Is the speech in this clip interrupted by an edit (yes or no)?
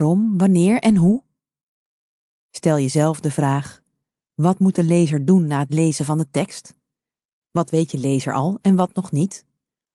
yes